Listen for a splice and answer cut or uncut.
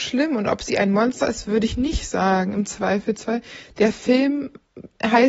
uncut